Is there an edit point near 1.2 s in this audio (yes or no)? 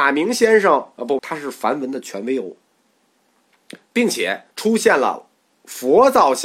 yes